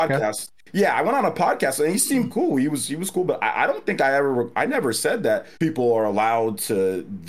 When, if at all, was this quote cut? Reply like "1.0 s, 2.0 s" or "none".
5.6 s